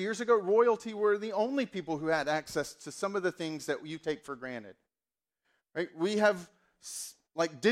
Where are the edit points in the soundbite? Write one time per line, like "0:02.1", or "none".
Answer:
none